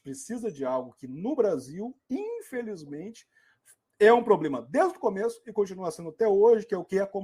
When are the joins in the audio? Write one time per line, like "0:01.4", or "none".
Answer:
none